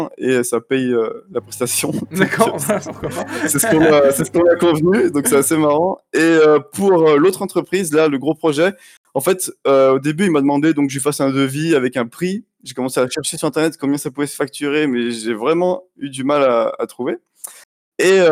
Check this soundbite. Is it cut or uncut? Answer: uncut